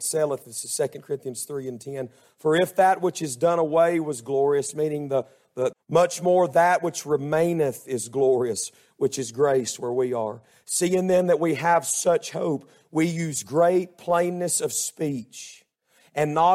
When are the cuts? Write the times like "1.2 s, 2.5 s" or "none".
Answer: 5.7 s

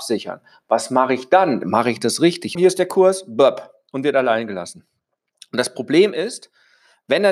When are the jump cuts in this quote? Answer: 2.6 s

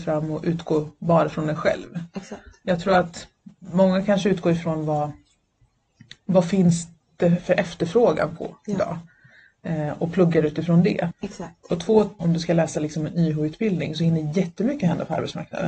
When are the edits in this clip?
11.1 s, 12.2 s

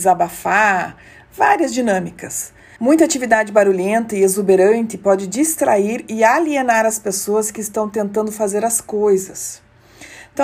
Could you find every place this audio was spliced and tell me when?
2.8 s

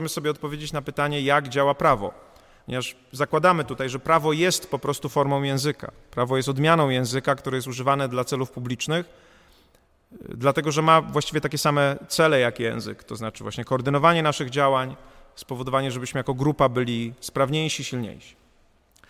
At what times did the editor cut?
none

